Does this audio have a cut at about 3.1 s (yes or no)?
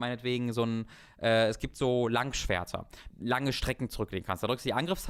yes